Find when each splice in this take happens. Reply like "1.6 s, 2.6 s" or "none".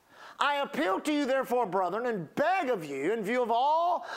none